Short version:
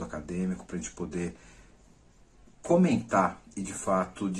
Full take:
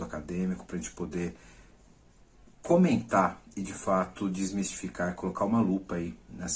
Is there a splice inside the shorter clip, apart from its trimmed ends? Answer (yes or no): no